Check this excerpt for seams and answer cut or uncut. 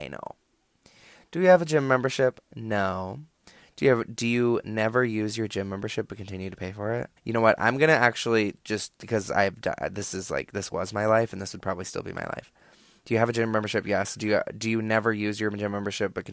cut